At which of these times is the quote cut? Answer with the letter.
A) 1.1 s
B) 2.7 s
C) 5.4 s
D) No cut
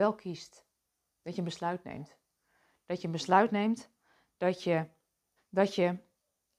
C